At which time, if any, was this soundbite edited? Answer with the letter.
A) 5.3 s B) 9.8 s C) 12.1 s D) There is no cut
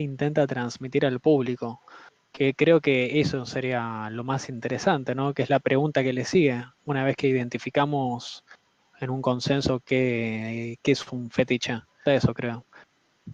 C